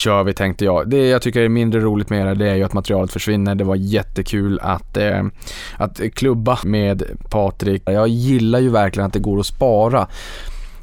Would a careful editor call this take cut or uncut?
cut